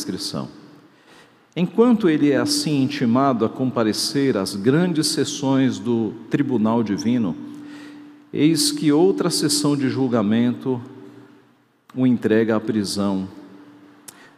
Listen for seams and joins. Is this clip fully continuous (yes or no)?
yes